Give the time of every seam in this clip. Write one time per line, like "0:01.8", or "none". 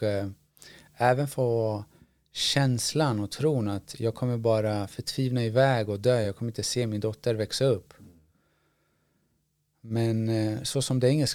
none